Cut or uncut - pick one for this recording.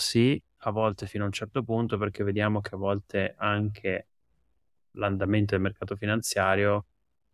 uncut